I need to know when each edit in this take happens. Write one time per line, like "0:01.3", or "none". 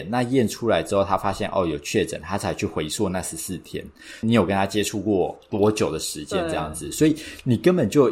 0:04.2